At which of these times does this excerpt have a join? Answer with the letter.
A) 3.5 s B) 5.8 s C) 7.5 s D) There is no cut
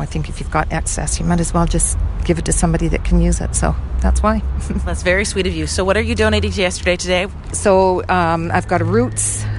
C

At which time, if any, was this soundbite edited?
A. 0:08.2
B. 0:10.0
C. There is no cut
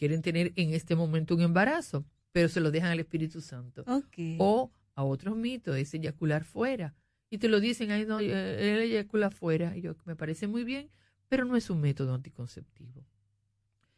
A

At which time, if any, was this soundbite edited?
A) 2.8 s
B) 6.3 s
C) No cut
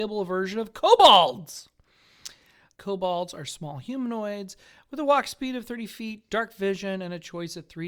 A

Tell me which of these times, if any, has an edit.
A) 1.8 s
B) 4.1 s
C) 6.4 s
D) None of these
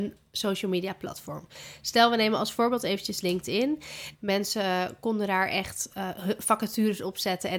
B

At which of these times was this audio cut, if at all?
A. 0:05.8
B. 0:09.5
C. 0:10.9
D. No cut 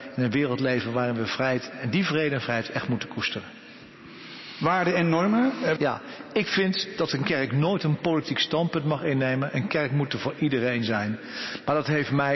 A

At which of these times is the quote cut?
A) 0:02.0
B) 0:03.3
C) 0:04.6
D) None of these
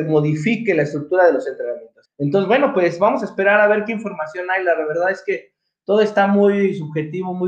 A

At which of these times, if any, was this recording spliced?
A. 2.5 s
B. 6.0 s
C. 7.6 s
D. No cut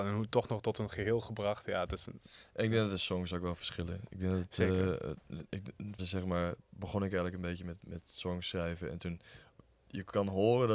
B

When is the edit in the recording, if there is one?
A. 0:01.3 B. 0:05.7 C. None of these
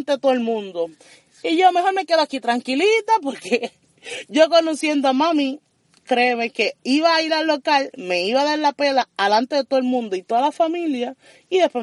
C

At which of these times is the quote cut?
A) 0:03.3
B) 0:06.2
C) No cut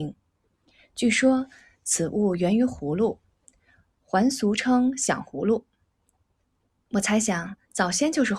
C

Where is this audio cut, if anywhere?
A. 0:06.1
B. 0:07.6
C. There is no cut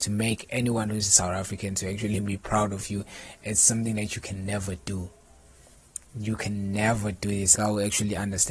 B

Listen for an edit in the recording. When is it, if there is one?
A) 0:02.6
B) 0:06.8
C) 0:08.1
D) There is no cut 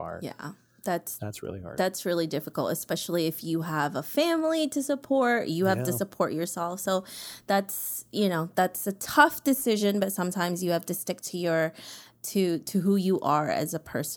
D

